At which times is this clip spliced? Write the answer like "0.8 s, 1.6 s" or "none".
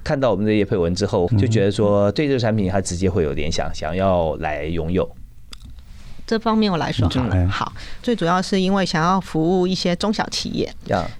1.3 s, 8.0 s